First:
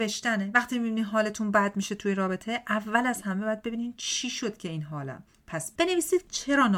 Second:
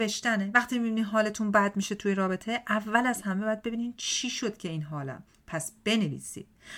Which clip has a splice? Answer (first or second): first